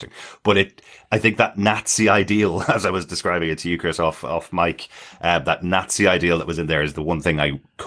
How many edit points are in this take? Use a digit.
0